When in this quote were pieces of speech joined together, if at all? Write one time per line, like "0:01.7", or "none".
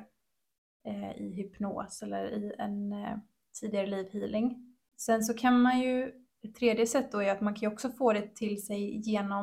none